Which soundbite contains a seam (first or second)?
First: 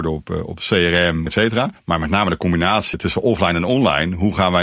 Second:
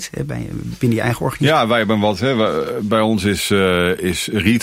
first